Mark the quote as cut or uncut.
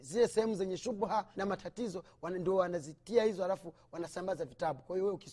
cut